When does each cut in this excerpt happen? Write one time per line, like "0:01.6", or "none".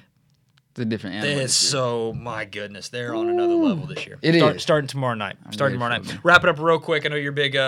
0:04.2